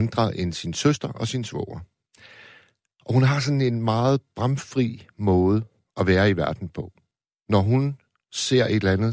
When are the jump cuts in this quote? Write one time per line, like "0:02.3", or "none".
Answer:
none